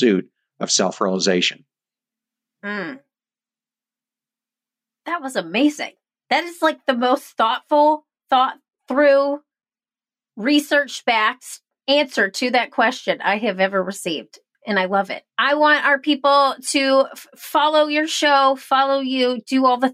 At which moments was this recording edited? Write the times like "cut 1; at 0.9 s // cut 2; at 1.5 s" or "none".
cut 1; at 15.3 s